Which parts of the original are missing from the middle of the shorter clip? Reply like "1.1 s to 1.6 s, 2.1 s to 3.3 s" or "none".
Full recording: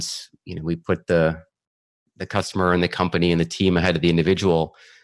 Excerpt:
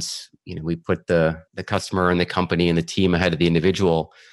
1.5 s to 2.1 s